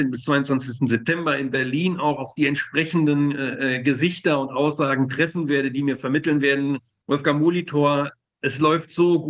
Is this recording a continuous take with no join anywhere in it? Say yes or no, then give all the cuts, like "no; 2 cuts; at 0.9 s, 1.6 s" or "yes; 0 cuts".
yes; 0 cuts